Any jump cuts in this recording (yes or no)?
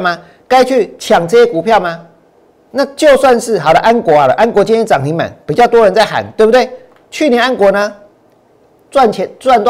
no